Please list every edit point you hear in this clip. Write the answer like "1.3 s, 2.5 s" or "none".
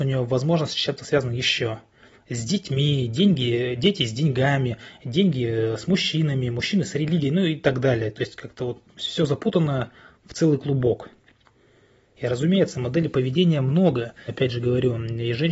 12.1 s, 14.3 s